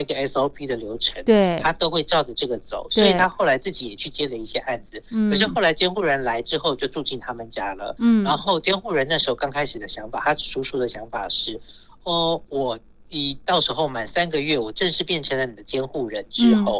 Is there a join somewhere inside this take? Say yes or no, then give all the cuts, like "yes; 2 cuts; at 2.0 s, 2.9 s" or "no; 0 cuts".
no; 0 cuts